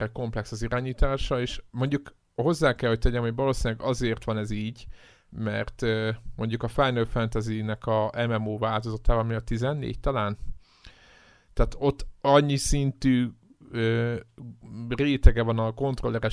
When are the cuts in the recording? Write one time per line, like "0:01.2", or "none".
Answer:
none